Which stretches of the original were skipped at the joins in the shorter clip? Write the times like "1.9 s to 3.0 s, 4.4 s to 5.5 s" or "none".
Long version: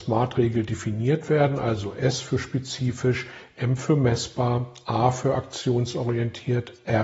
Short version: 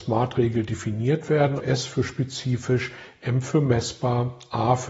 1.6 s to 1.9 s